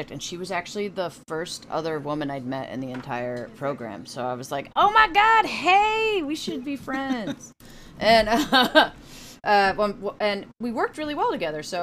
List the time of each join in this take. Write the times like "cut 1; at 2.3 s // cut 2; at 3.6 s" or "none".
none